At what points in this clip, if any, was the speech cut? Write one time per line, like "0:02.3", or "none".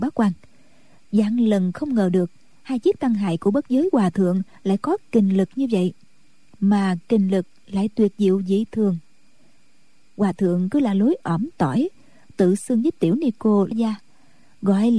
0:13.7